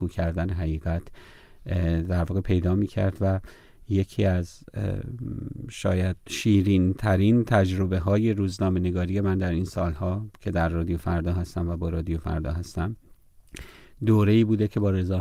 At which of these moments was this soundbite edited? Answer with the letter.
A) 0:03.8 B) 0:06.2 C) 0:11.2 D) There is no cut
B